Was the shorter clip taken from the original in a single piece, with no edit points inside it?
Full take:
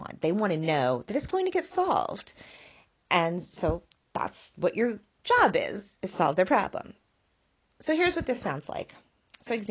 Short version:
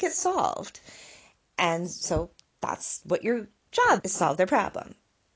no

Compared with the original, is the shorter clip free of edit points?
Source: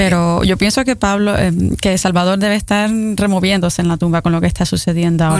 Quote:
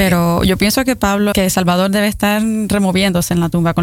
no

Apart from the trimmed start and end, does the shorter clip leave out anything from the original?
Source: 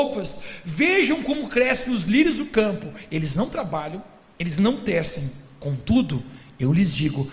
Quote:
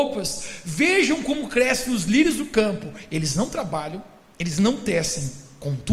no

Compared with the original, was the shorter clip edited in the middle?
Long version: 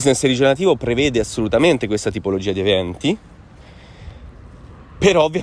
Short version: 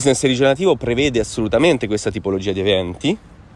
no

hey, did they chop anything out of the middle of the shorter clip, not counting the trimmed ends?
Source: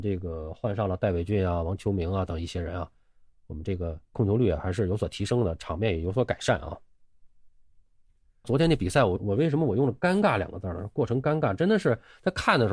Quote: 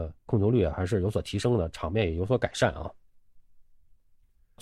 no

